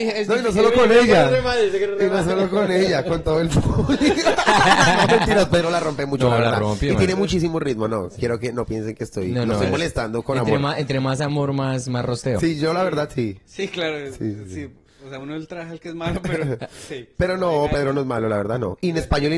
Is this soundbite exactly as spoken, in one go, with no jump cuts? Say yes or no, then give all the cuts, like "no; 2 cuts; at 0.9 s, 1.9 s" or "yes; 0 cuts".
yes; 0 cuts